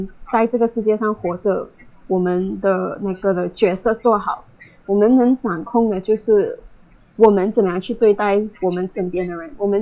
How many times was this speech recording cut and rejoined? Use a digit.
0